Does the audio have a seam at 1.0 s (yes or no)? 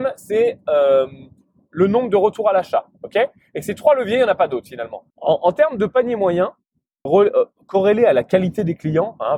no